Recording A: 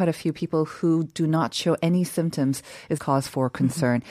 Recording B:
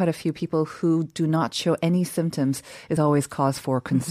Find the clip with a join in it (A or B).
A